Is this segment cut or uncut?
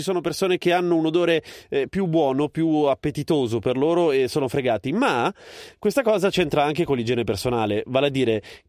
uncut